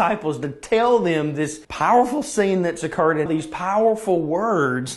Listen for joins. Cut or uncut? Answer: cut